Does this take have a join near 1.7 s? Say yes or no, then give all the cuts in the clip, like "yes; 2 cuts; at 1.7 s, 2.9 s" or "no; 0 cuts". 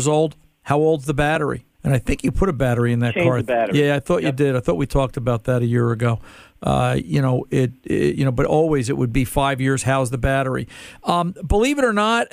yes; 1 cut; at 1.7 s